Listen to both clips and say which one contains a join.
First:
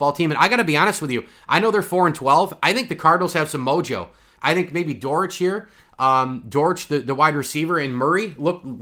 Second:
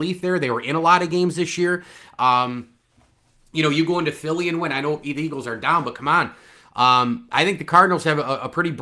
first; 1 cut; at 4.4 s

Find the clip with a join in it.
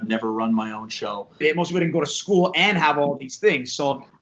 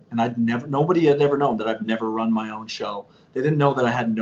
first; 1 cut; at 1.4 s

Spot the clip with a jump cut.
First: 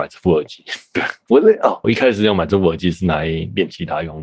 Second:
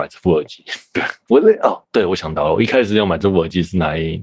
first; 1 cut; at 1.8 s

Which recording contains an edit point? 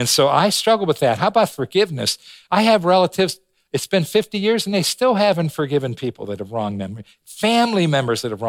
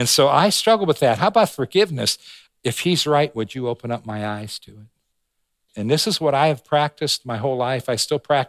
second; 2 cuts; at 2.5 s, 5.7 s

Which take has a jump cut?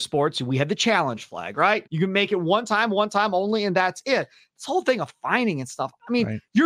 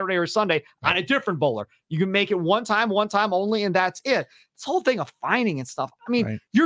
first; 1 cut; at 1.8 s

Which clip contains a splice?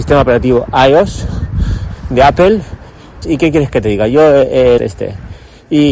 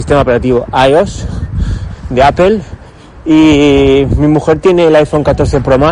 first; 2 cuts; at 3.2 s, 4.8 s

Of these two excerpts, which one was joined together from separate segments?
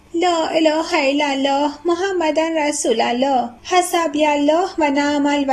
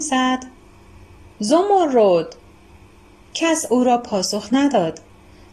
first; 1 cut; at 3.6 s

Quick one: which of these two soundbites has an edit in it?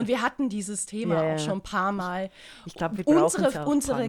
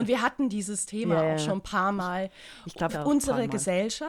second; 1 cut; at 2.9 s

